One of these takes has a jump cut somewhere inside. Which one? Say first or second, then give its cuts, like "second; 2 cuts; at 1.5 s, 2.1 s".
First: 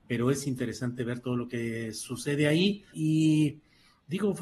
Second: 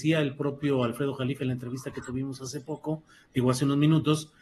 first; 1 cut; at 2.9 s